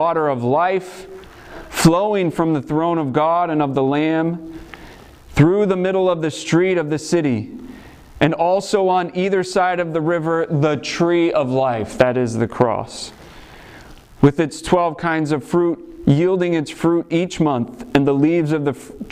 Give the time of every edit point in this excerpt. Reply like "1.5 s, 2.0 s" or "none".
none